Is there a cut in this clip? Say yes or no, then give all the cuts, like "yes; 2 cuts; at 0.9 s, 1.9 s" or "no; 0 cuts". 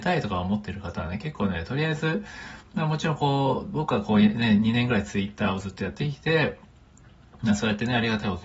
no; 0 cuts